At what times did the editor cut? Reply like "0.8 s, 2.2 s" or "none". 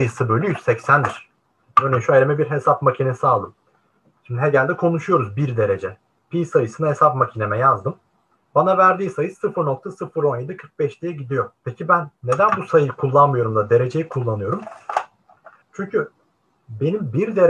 8.4 s, 11.6 s, 15.6 s